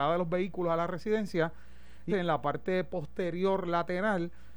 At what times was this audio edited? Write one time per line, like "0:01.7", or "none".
0:02.1